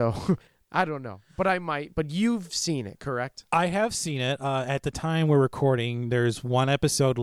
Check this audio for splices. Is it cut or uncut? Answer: uncut